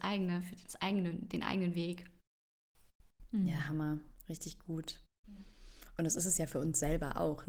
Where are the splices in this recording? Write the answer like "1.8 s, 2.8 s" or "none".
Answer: none